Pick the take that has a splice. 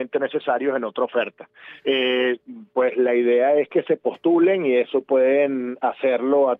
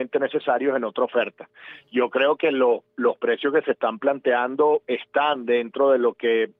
first; 1 cut; at 1.8 s

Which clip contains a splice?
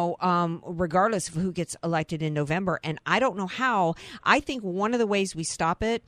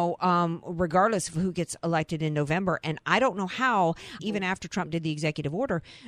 second; 1 cut; at 4.2 s

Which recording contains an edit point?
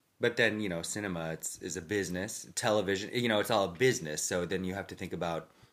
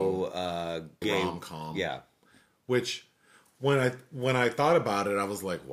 second; 1 cut; at 1.0 s

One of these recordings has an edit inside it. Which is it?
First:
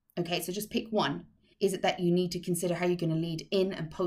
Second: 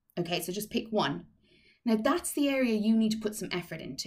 first; 1 cut; at 1.5 s

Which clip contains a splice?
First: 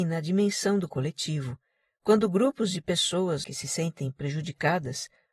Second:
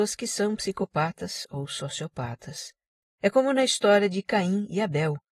second; 1 cut; at 3.0 s

